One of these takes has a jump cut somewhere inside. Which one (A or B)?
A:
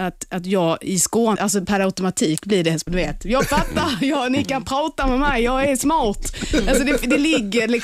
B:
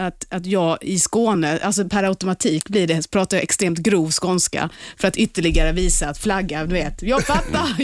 A